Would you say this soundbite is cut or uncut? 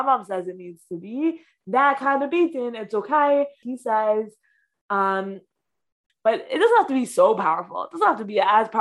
cut